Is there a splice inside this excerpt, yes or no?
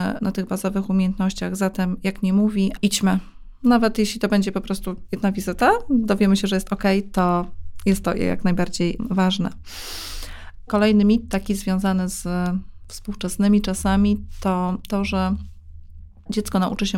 yes